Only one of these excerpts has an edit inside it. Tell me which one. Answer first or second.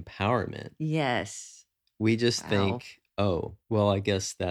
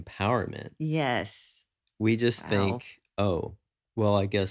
first